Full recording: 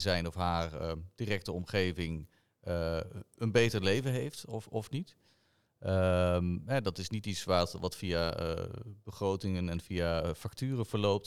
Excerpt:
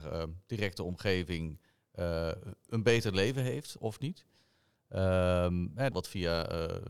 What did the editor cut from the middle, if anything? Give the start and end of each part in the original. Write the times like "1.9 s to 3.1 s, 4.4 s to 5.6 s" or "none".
4.5 s to 4.7 s, 6.8 s to 7.8 s